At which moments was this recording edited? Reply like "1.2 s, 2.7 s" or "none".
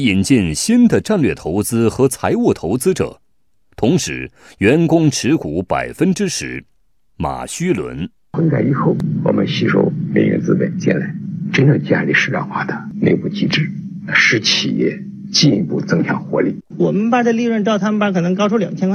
7.1 s, 16.7 s

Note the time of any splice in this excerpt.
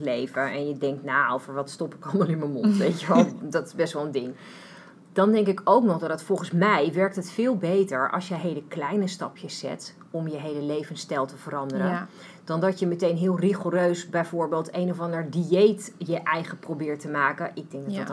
none

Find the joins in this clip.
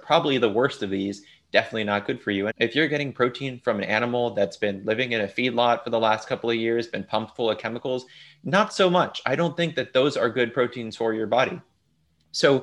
2.5 s

